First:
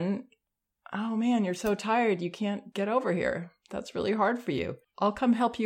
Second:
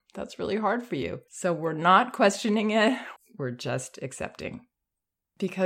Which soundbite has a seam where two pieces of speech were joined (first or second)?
second